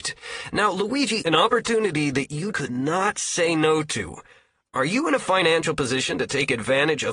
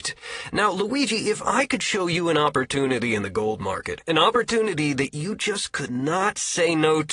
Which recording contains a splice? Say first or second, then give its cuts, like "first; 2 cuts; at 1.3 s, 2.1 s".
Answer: first; 2 cuts; at 1.2 s, 2.5 s